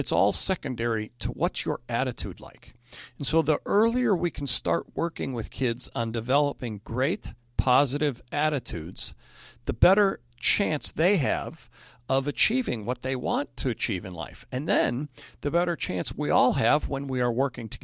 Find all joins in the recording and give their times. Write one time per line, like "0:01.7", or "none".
none